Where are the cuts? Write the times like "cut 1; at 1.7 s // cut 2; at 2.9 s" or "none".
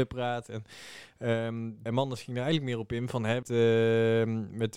cut 1; at 1.9 s // cut 2; at 3.4 s